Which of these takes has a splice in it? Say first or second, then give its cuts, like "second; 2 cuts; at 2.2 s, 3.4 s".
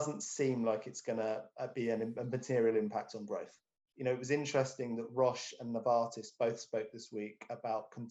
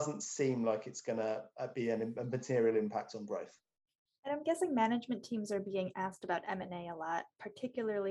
first; 1 cut; at 3.9 s